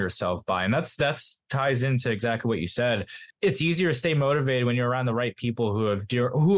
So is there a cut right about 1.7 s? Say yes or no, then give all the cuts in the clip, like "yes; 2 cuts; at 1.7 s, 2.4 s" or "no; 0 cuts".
no; 0 cuts